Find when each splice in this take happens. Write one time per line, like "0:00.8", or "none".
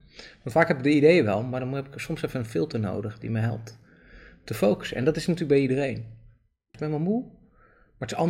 0:06.7